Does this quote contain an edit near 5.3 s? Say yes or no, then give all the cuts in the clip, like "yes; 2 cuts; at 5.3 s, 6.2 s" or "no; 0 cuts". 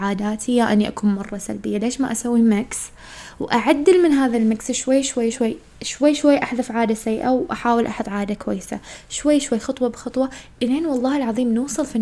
yes; 1 cut; at 5.3 s